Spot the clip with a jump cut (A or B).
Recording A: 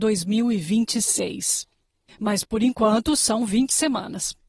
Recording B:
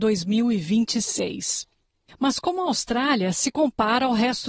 B